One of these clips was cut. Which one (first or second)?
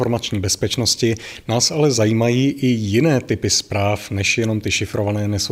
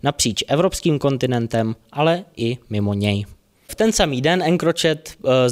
second